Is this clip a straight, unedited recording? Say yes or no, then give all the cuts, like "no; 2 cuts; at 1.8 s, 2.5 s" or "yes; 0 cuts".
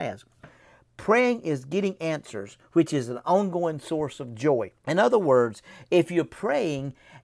no; 1 cut; at 4.8 s